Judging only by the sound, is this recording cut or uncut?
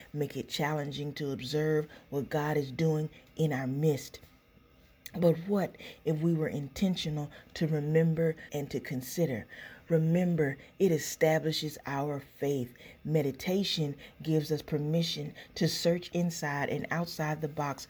cut